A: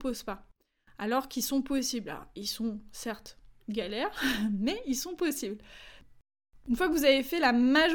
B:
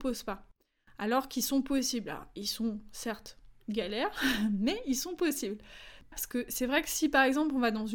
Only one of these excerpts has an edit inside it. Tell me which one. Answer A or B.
B